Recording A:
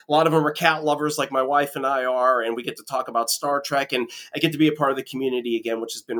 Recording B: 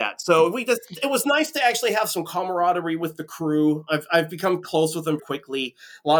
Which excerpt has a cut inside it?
B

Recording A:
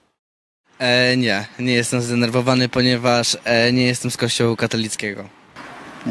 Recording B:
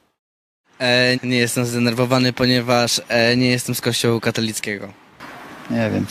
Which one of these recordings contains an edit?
B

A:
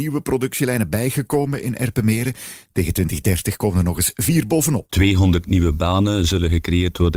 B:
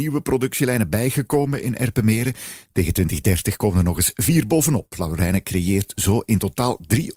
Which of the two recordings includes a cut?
A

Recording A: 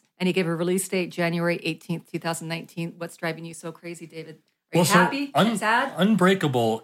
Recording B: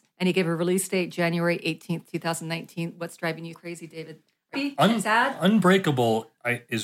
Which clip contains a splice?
B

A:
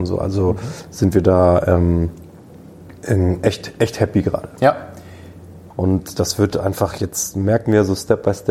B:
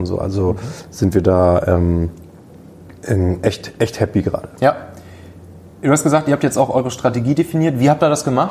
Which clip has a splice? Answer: A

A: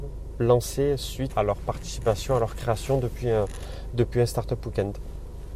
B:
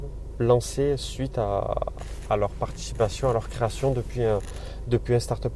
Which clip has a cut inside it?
A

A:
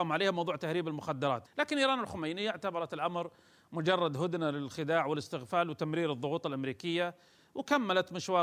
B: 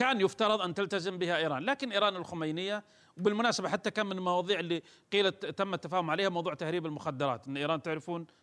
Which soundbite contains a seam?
A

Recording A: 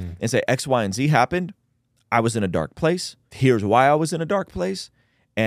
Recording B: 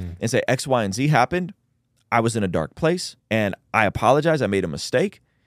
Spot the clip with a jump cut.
B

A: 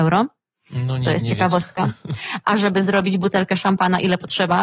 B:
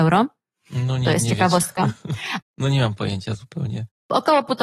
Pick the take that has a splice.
B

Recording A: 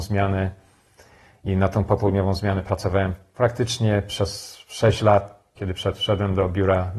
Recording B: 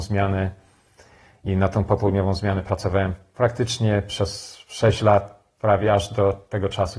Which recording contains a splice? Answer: A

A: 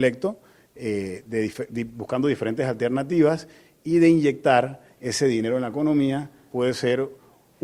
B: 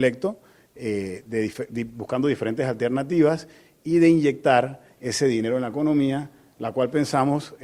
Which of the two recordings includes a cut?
A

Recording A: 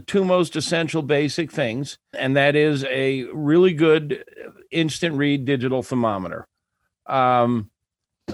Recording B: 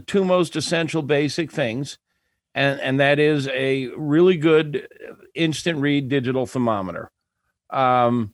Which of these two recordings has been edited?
A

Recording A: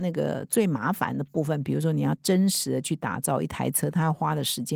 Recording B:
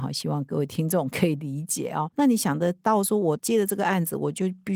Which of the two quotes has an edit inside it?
B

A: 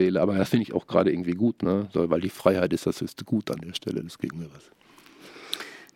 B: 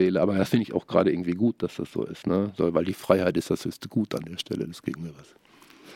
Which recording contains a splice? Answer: A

